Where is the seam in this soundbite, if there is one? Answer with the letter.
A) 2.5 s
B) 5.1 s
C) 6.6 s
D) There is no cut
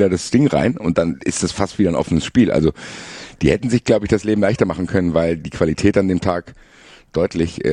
D